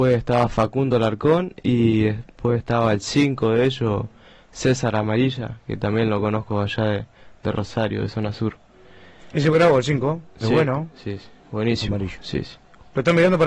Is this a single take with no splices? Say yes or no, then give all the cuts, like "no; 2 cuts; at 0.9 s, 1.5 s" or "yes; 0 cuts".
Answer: yes; 0 cuts